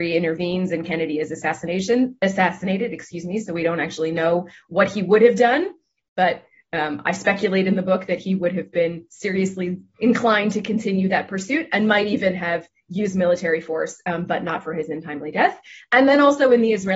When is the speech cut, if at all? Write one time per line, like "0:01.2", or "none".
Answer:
none